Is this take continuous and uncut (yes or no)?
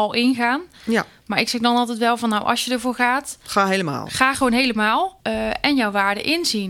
no